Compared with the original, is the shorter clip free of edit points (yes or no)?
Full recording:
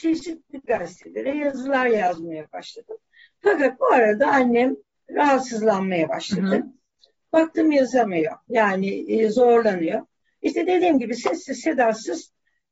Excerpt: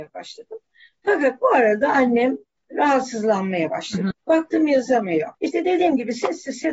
no